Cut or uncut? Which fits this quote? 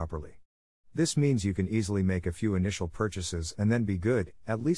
uncut